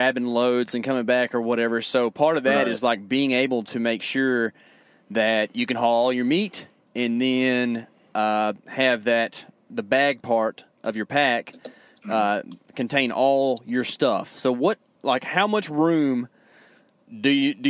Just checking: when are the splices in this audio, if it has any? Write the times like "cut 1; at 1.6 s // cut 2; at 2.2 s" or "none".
none

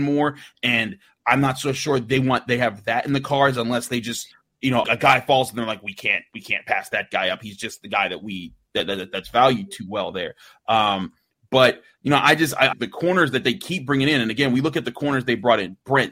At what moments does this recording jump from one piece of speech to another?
cut 1; at 4.8 s // cut 2; at 12.7 s

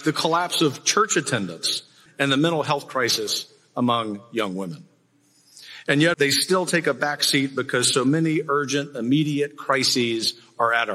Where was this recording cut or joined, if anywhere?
cut 1; at 2.1 s // cut 2; at 6.1 s

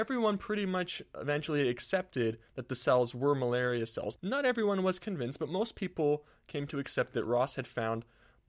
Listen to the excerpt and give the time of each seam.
none

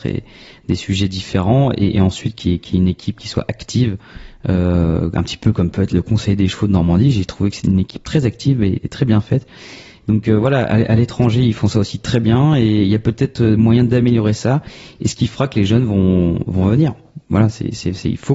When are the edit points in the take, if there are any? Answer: cut 1; at 7.6 s

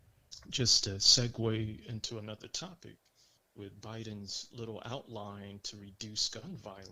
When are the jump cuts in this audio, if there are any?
none

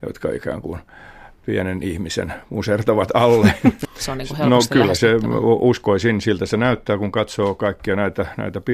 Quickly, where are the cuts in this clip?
cut 1; at 3.8 s

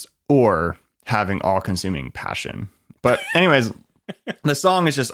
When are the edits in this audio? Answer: cut 1; at 3.0 s

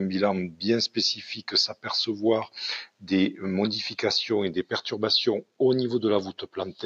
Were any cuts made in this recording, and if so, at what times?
none

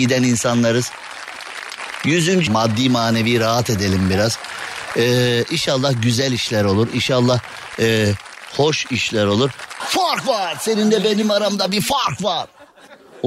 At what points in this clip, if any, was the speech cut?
cut 1; at 2.5 s // cut 2; at 9.8 s

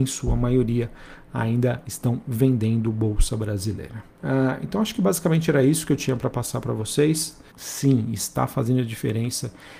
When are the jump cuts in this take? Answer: cut 1; at 4.2 s // cut 2; at 7.5 s

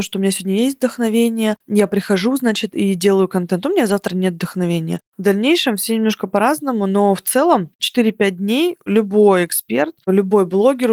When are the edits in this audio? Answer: cut 1; at 5.1 s

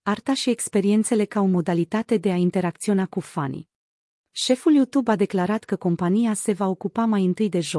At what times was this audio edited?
cut 1; at 4.1 s

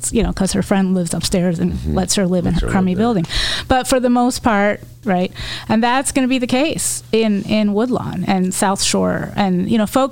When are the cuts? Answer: cut 1; at 5.0 s

